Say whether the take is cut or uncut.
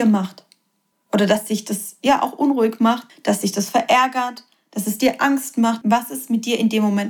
cut